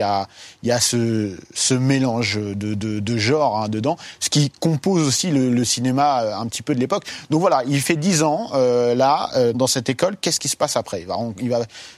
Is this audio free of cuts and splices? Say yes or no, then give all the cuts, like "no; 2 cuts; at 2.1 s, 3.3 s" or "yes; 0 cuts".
no; 1 cut; at 9.5 s